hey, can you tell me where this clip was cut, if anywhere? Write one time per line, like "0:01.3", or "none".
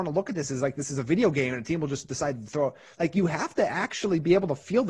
none